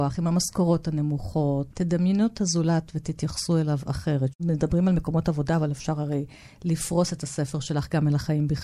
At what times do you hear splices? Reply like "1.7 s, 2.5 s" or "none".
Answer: 1.7 s

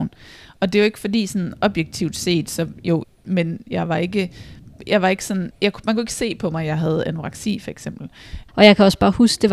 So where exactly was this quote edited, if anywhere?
3.0 s, 5.5 s, 8.5 s

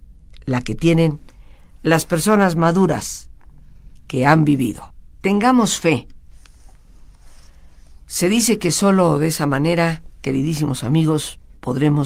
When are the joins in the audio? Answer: none

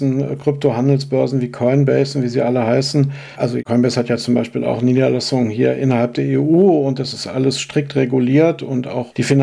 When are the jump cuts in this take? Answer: none

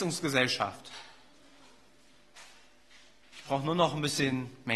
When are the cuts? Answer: none

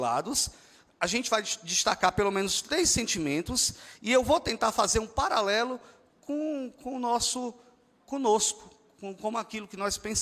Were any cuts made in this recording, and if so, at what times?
none

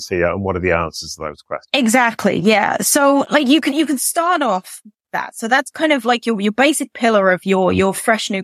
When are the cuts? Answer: none

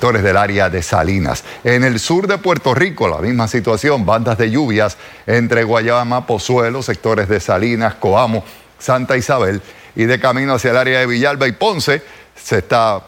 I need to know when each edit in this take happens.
none

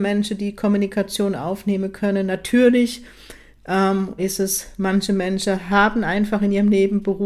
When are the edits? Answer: 4.2 s

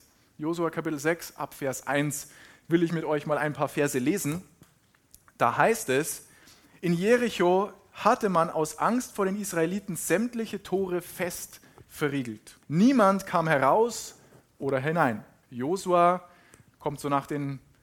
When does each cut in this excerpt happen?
12.6 s, 15.4 s

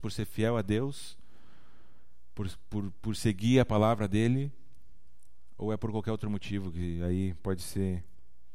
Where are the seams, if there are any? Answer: none

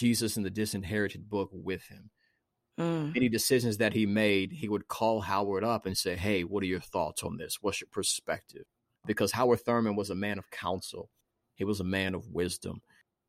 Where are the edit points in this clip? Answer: none

